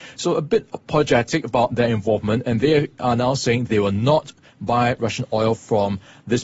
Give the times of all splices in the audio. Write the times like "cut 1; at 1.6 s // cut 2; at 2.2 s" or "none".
none